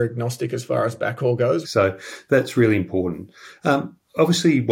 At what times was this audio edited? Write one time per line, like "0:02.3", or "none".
0:01.6